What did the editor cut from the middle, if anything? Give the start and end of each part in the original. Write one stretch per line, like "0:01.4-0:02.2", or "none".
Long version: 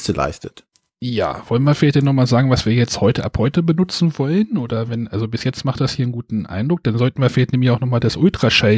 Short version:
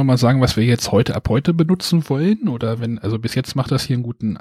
none